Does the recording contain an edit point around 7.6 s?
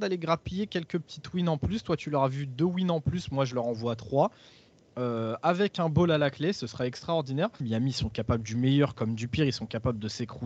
yes; 1 cut; at 7.6 s

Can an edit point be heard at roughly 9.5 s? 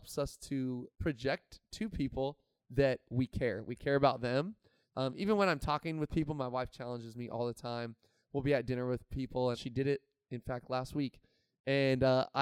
yes; 3 cuts; at 0.9 s, 4.8 s, 9.5 s

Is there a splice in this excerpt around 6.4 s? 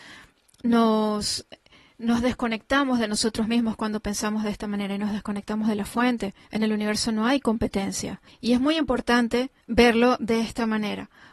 yes; 3 cuts; at 6.4 s, 8.3 s, 9.6 s

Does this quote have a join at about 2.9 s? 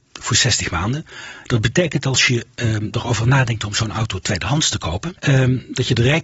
no; 1 cut; at 5.2 s

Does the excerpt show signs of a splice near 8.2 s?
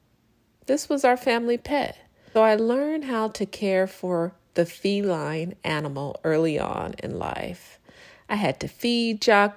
no; 1 cut; at 2.4 s

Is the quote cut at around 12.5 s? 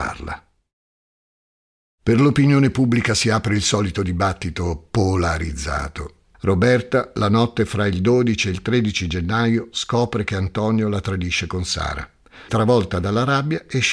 yes; 2 cuts; at 6.3 s, 12.5 s

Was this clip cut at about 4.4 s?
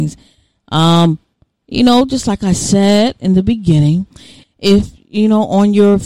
yes; 1 cut; at 4.4 s

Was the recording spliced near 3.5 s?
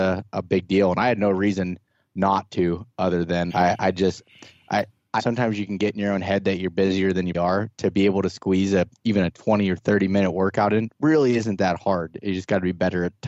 yes; 3 cuts; at 3.5 s, 5.2 s, 7.3 s

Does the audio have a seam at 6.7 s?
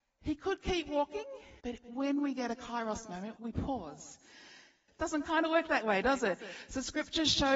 no; 3 cuts; at 1.6 s, 3.4 s, 4.9 s

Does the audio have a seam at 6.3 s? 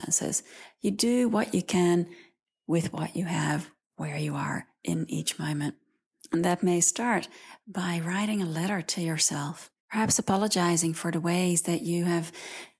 no; 1 cut; at 9.8 s

